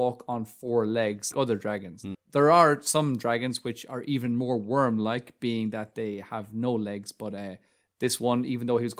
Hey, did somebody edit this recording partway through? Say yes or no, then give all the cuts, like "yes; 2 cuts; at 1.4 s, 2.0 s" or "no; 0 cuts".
yes; 1 cut; at 1.3 s